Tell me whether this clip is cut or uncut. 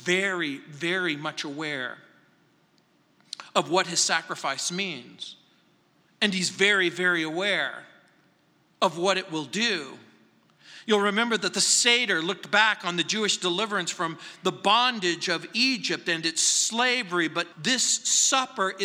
cut